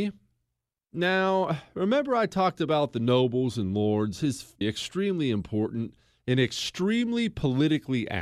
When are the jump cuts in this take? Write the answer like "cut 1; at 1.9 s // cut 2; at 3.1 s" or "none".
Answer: cut 1; at 4.6 s